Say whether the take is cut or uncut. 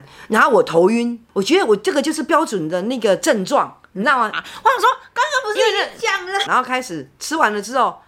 cut